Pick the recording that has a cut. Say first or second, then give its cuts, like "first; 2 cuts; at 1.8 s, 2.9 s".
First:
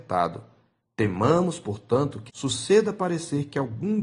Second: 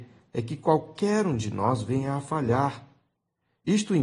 first; 1 cut; at 2.3 s